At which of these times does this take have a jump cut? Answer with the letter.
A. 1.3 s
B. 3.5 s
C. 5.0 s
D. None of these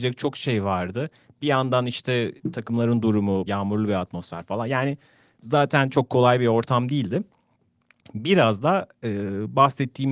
B